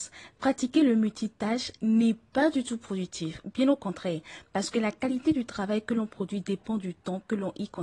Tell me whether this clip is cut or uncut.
uncut